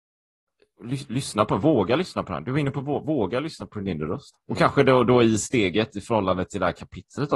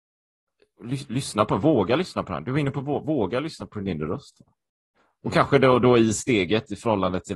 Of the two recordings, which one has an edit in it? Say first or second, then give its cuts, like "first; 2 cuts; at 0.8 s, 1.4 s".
first; 1 cut; at 4.3 s